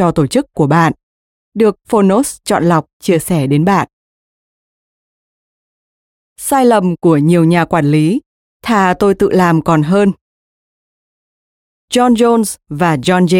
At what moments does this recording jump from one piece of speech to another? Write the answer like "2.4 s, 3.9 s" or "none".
6.2 s